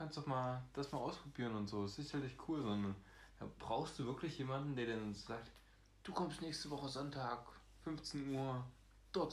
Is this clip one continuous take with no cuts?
yes; 0 cuts

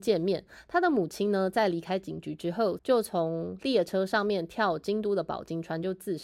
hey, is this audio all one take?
no; 1 cut; at 2.8 s

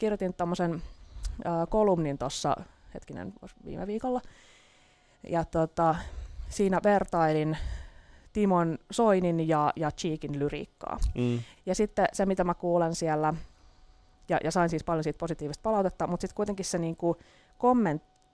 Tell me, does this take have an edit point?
yes; 1 cut; at 11.6 s

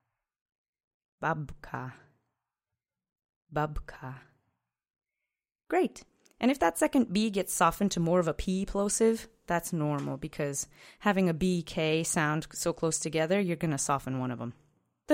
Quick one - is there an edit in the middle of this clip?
no; 0 cuts

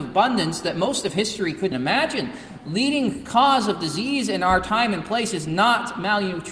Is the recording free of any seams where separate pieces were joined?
no; 1 cut; at 1.7 s

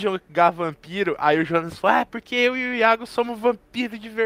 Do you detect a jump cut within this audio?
no; 0 cuts

